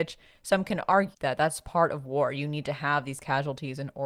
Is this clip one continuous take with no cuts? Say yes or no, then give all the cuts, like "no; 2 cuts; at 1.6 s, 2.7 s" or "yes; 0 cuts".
no; 1 cut; at 1.1 s